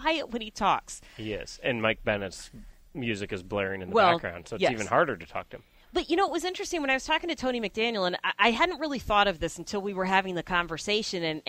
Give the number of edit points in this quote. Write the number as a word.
zero